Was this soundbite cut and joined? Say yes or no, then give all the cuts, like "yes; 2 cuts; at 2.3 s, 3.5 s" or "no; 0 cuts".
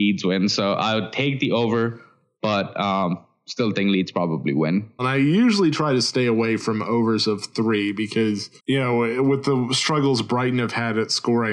yes; 2 cuts; at 5.0 s, 8.6 s